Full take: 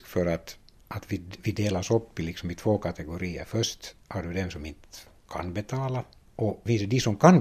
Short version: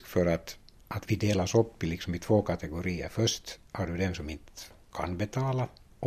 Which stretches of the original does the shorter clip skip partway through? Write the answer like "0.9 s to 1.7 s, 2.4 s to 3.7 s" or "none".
1.1 s to 1.4 s